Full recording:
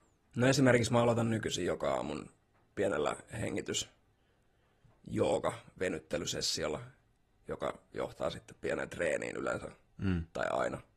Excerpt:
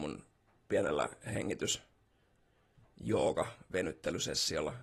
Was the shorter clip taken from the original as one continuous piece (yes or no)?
yes